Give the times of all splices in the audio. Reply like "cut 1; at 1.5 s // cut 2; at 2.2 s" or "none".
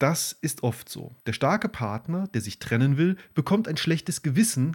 cut 1; at 1.2 s